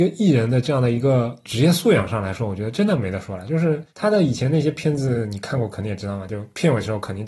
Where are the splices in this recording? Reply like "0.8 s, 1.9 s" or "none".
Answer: none